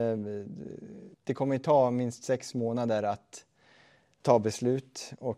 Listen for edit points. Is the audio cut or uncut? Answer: cut